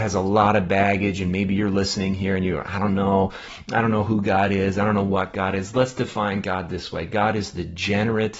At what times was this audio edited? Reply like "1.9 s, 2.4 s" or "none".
none